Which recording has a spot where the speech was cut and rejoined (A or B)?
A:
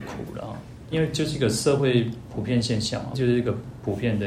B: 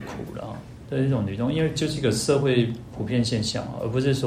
A